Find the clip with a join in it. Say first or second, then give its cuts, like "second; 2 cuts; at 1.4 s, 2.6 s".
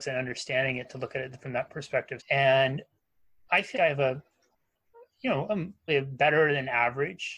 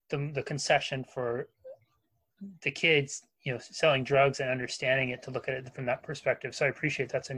first; 3 cuts; at 2.2 s, 3.7 s, 5.9 s